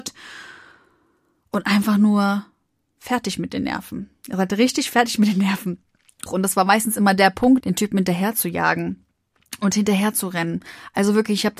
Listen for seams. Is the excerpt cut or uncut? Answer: cut